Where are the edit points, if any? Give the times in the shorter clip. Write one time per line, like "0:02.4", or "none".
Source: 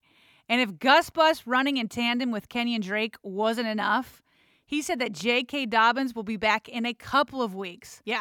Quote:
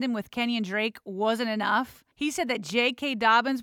0:02.1